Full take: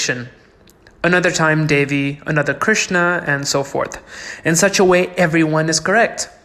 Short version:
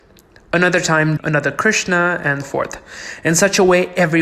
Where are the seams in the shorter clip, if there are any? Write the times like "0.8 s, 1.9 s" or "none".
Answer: 1.2 s, 2.4 s